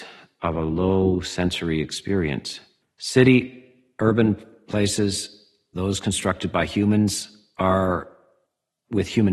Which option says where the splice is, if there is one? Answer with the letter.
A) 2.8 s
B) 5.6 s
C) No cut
A